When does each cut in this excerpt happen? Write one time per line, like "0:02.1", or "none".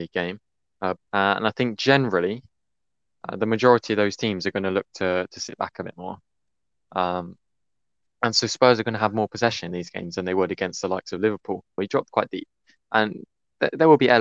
0:01.0
0:11.8